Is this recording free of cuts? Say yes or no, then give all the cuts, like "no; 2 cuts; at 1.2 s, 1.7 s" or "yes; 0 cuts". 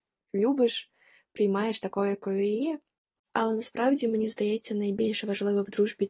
no; 1 cut; at 3.2 s